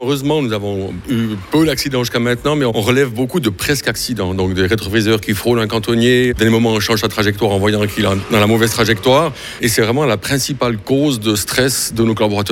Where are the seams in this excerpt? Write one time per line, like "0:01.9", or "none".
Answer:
0:06.4